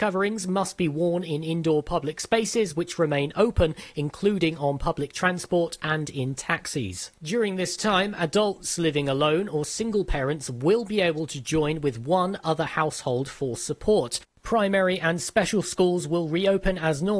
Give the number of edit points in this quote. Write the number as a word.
zero